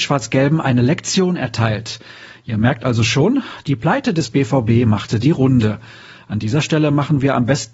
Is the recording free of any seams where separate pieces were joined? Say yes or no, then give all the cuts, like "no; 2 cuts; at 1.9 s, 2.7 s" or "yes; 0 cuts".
yes; 0 cuts